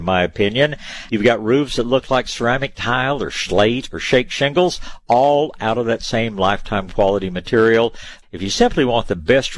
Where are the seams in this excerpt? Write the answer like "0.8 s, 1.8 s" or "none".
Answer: 1.1 s, 8.2 s